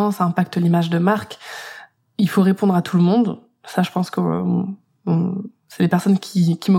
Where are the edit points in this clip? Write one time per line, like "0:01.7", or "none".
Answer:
none